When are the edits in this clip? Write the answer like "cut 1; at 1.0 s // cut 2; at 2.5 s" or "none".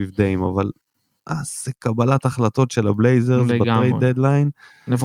none

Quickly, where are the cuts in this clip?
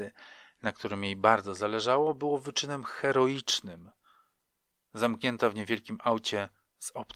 none

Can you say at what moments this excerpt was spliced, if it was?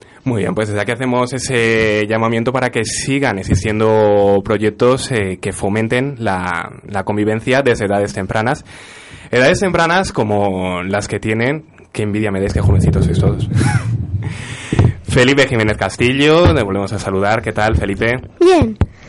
none

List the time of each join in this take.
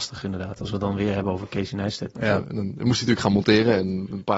cut 1; at 2.1 s

